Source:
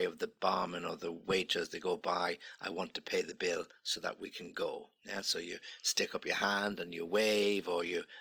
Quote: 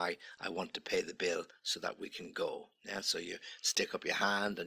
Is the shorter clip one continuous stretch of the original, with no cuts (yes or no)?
yes